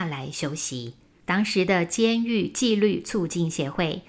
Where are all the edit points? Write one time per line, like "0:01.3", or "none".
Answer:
0:01.2